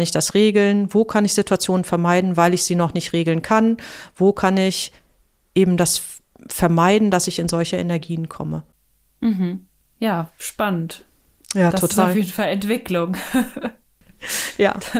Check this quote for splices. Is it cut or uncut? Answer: uncut